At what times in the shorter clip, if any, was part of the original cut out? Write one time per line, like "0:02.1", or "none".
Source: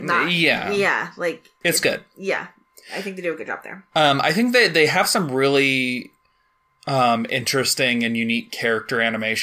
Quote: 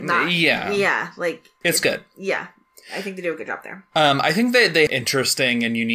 0:04.9